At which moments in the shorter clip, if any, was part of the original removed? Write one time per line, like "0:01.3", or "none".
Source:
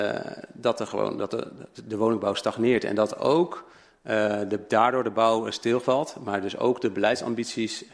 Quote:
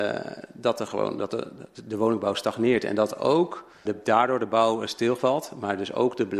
0:03.9